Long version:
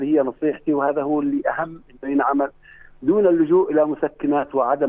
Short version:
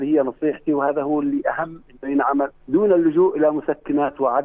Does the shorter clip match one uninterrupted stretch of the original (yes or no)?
no